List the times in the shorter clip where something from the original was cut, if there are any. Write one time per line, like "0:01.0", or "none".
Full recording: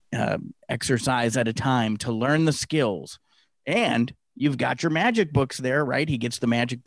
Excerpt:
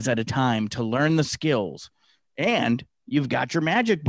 none